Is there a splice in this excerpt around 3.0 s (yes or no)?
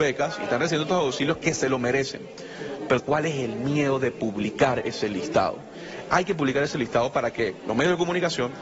yes